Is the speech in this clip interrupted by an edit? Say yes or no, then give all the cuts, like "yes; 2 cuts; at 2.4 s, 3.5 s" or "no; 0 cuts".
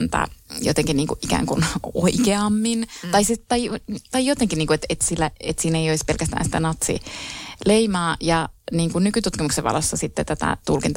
no; 0 cuts